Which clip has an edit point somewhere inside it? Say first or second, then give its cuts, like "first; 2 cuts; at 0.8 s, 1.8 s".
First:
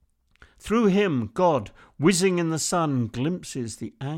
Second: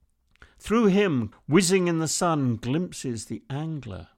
second; 1 cut; at 1.3 s